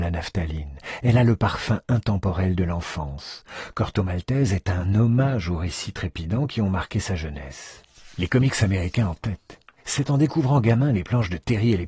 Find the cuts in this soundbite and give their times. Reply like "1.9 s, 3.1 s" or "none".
none